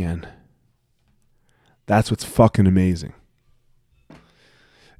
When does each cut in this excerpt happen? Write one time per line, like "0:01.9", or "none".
none